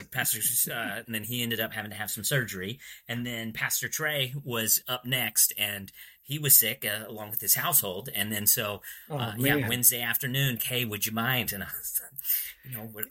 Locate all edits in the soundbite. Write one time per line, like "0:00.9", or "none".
0:01.0
0:10.6